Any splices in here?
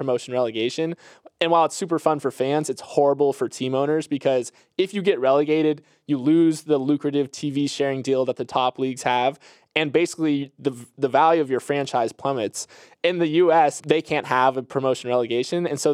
yes; 1 cut; at 13.8 s

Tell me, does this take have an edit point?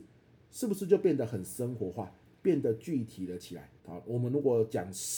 yes; 1 cut; at 3.8 s

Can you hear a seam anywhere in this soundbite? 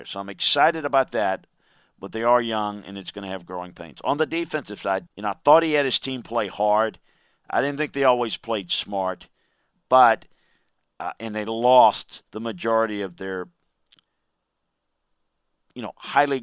yes; 3 cuts; at 5.1 s, 9.7 s, 12.3 s

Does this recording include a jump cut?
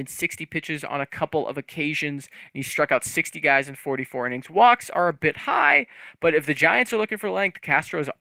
no; 0 cuts

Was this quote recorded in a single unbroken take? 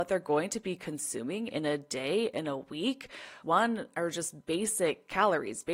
no; 1 cut; at 3.4 s

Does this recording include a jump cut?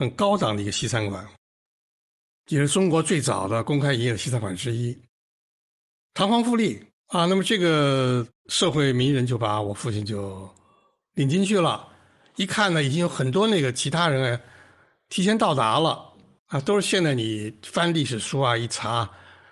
yes; 2 cuts; at 6.9 s, 16.4 s

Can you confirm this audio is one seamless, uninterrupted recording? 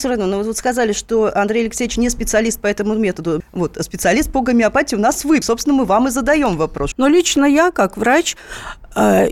no; 3 cuts; at 3.4 s, 5.4 s, 6.9 s

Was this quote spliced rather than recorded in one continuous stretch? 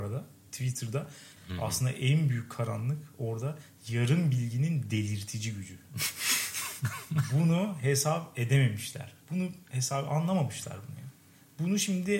yes; 1 cut; at 1.4 s

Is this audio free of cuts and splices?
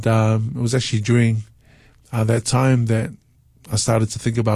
yes; 0 cuts

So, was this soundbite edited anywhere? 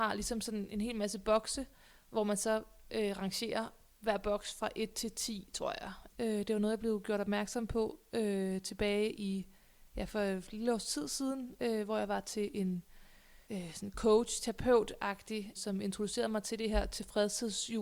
yes; 3 cuts; at 6.1 s, 13.4 s, 15.5 s

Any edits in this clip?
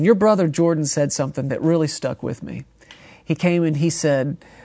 no; 0 cuts

